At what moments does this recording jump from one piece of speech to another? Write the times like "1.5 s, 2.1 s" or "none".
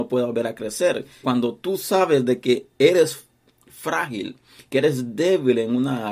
1.2 s

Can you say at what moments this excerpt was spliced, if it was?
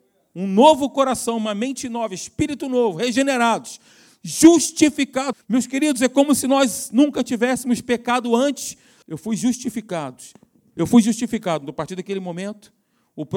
5.3 s, 9.0 s

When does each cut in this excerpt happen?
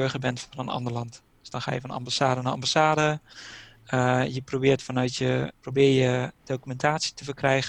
5.5 s

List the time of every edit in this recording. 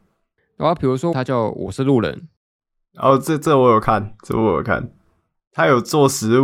1.1 s

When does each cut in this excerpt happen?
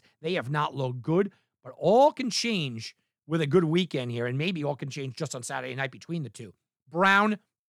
none

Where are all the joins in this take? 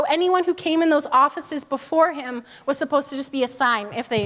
none

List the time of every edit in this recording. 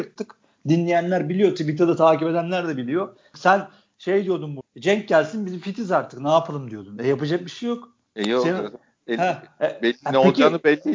3.3 s

